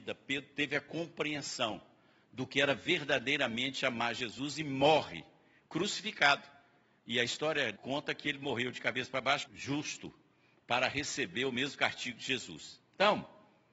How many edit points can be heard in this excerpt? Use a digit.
2